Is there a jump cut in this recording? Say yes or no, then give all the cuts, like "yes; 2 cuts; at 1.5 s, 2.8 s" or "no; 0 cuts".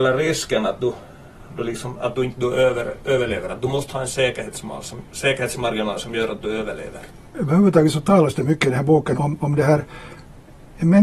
yes; 1 cut; at 9.1 s